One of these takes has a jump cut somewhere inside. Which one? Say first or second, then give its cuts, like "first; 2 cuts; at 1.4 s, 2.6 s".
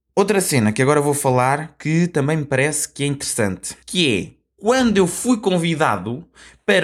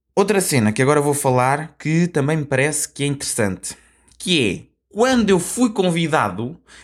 first; 1 cut; at 3.8 s